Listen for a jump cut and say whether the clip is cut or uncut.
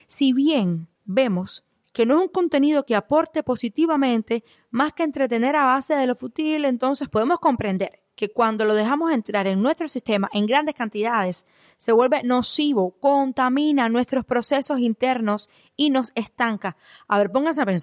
uncut